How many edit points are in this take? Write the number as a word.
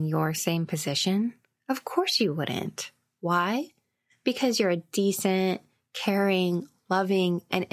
zero